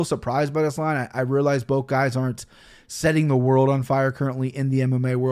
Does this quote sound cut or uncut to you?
uncut